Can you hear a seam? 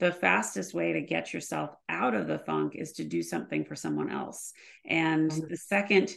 no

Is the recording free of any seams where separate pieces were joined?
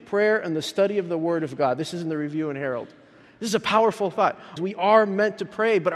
no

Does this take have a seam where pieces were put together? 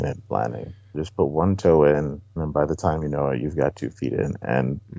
yes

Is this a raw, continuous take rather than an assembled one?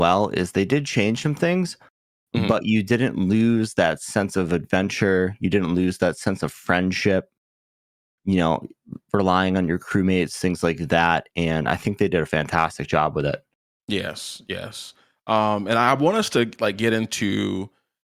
yes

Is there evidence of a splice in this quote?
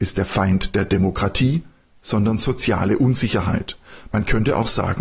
no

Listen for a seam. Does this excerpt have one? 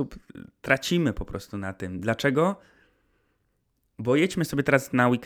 no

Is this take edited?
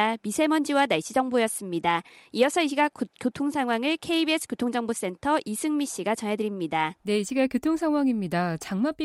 yes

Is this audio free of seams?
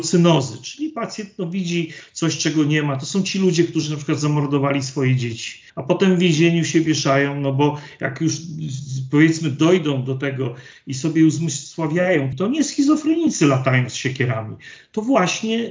no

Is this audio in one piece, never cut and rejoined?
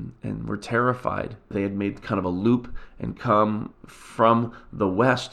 no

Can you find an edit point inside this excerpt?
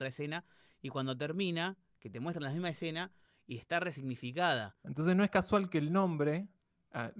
yes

